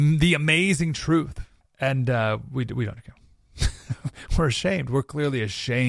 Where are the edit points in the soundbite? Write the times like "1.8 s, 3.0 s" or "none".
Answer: 1.6 s